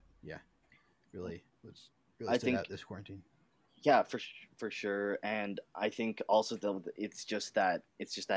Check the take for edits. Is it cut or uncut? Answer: uncut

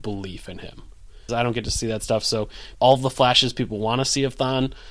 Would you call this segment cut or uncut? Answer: cut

